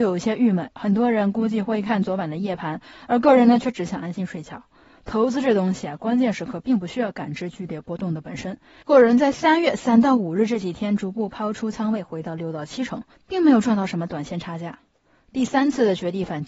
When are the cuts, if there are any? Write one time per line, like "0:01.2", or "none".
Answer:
0:08.8